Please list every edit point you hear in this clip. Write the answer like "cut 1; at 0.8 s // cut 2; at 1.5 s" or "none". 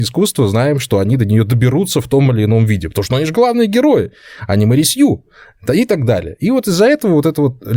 none